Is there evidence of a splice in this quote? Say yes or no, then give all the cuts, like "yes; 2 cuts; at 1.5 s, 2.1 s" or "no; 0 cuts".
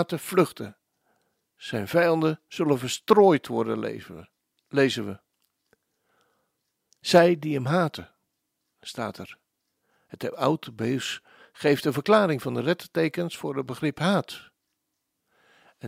no; 0 cuts